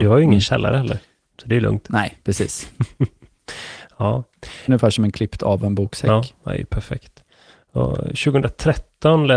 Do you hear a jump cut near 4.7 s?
yes; 1 cut; at 4.7 s

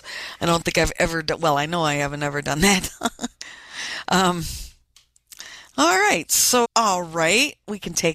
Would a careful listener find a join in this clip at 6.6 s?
yes; 1 cut; at 6.6 s

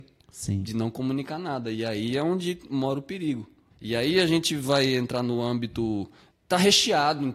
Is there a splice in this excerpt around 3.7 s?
yes; 2 cuts; at 3.7 s, 6.3 s

